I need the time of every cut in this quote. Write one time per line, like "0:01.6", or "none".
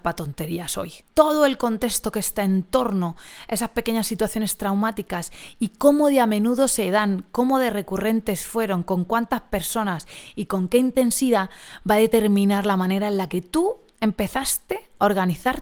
none